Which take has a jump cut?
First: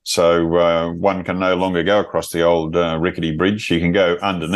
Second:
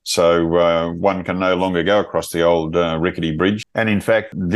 second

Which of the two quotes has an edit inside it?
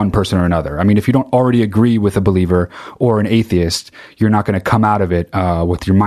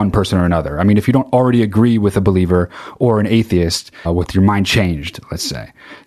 second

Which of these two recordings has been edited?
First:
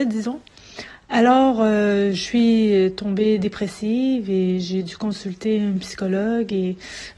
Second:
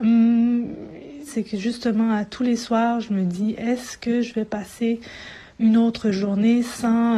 second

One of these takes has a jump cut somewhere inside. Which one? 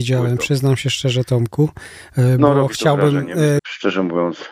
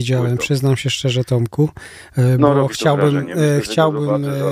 first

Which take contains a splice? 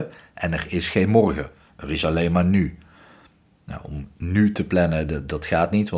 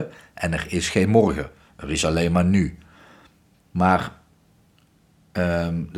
second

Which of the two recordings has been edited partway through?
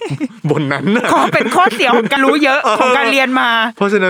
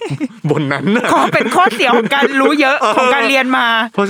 first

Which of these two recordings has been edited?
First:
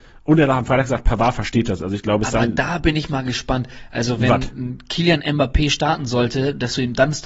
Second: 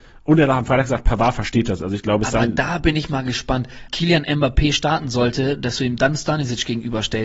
second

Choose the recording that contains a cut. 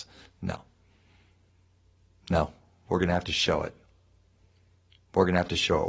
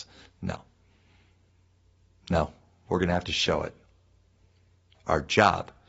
second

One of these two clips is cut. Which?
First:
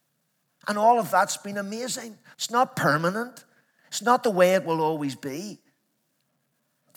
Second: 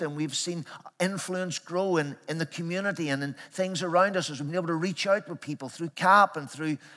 first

